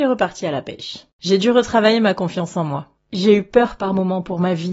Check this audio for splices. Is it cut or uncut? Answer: cut